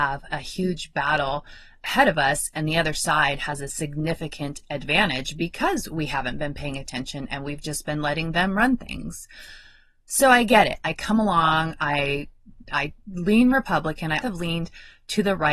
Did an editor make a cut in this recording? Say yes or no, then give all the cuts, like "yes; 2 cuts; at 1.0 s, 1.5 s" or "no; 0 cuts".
yes; 2 cuts; at 10.8 s, 14.2 s